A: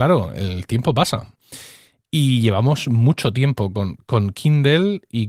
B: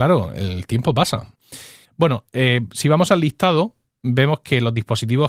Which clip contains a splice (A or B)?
B